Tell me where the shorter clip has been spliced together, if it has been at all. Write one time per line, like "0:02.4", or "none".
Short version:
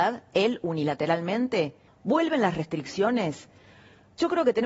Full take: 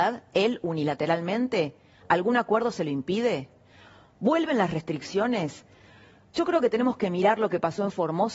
0:01.9